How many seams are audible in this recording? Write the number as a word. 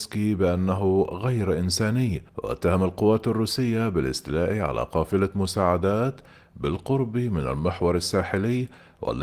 one